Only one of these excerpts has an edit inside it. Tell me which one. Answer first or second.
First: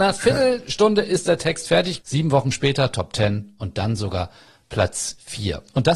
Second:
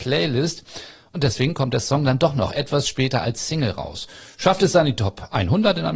first